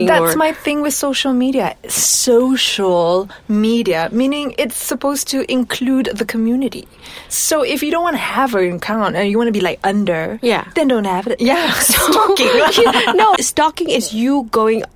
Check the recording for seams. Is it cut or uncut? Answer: cut